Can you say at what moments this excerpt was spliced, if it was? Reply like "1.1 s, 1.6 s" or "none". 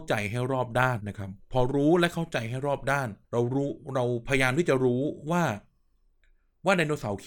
1.0 s, 3.2 s